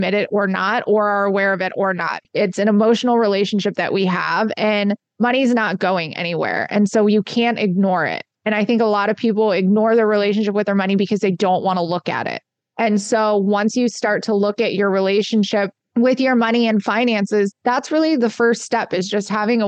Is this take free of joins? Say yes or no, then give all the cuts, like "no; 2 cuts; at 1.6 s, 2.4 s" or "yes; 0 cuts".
yes; 0 cuts